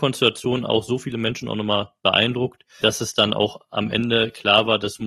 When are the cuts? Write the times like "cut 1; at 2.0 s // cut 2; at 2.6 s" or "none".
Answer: cut 1; at 2.8 s